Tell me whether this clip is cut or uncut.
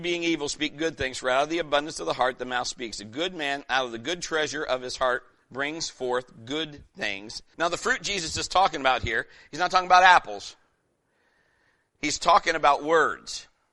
cut